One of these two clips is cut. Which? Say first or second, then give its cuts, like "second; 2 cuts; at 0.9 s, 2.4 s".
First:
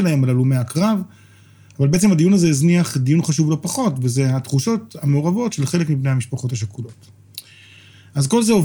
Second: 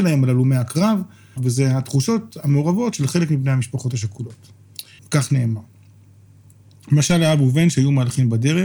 second; 2 cuts; at 1.4 s, 5.0 s